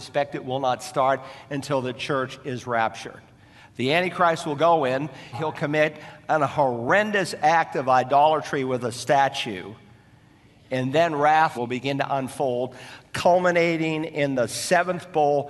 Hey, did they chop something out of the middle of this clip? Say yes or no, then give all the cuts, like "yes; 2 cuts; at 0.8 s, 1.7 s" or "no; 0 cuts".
yes; 2 cuts; at 5.3 s, 11.5 s